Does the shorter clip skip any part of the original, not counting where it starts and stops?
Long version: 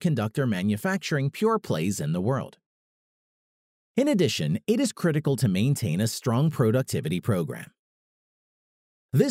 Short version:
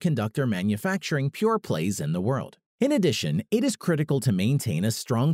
yes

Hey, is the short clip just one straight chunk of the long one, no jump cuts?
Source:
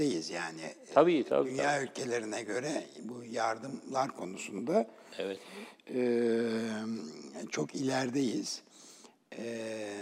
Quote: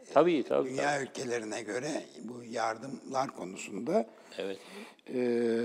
yes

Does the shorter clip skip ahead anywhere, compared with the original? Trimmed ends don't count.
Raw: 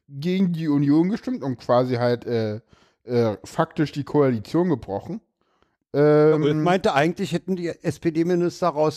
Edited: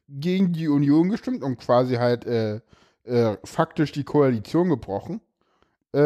no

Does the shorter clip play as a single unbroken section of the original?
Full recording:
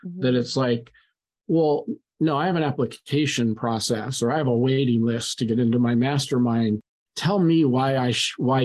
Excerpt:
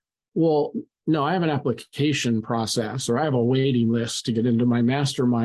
yes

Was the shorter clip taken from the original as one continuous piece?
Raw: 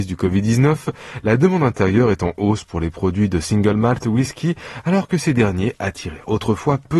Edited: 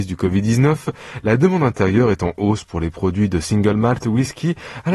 yes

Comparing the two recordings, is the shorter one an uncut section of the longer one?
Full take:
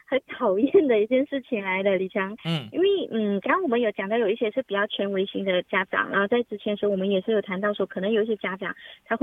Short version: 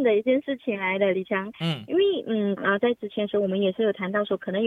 no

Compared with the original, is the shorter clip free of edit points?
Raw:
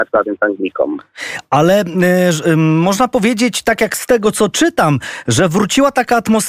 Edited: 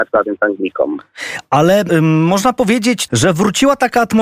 no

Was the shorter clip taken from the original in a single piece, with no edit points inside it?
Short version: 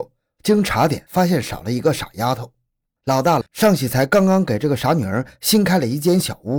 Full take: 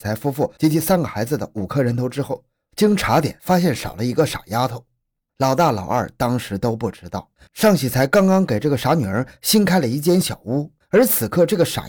no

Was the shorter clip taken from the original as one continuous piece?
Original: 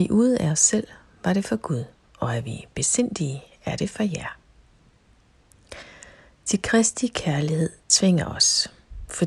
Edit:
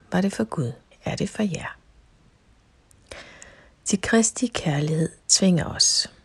no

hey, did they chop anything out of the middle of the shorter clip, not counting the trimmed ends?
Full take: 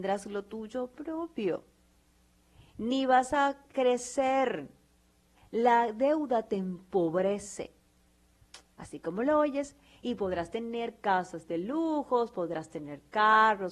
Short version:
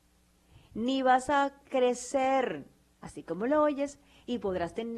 yes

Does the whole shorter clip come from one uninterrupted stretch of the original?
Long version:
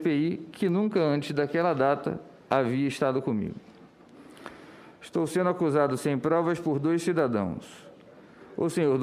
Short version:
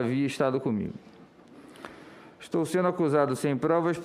yes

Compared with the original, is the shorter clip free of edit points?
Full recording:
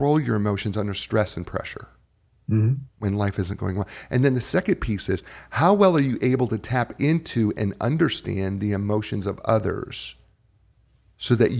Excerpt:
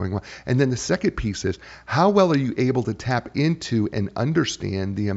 yes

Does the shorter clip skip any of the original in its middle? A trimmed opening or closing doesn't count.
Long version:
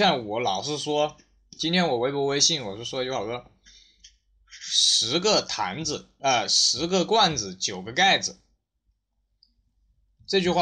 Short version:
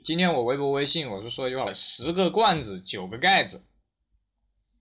yes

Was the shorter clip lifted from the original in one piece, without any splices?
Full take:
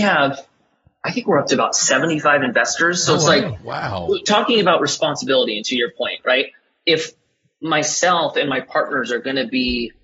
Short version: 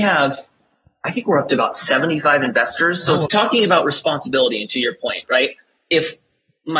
no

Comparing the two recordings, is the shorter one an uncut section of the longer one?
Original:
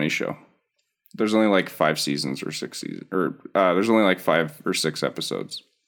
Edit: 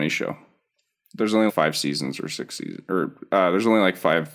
no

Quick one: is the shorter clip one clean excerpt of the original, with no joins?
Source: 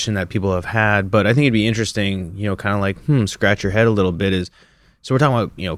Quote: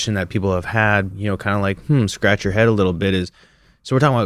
no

